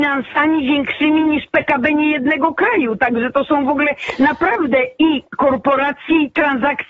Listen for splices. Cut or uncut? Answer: uncut